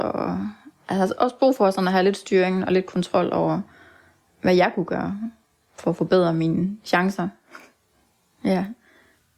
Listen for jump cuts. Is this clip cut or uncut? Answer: cut